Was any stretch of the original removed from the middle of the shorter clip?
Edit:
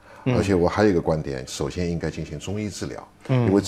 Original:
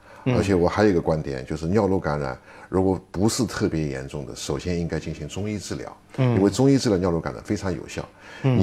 yes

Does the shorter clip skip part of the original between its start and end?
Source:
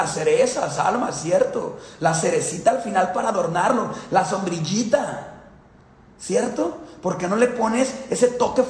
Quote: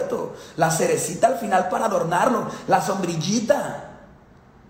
no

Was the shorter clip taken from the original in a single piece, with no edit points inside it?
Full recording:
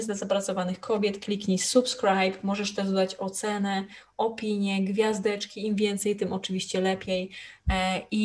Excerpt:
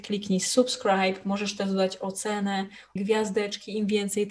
no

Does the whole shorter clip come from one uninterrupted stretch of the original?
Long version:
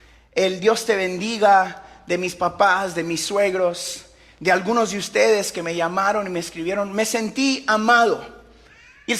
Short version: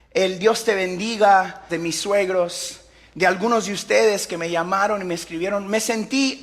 no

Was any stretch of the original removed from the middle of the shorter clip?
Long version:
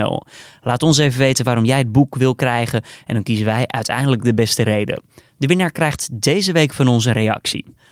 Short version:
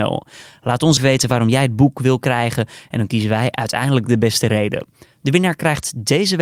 yes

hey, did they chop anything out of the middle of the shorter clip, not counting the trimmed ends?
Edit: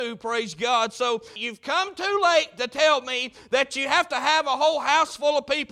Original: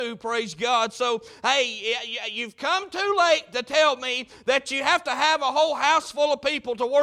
yes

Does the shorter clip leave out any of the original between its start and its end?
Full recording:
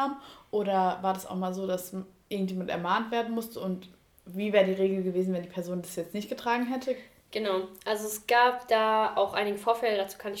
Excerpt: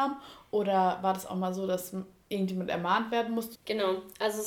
yes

